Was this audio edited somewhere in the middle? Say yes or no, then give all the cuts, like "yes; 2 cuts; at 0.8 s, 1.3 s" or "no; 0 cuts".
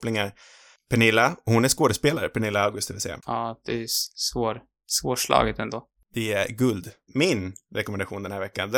yes; 2 cuts; at 3.2 s, 7.1 s